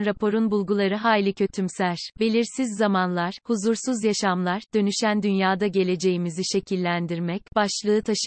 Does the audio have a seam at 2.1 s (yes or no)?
yes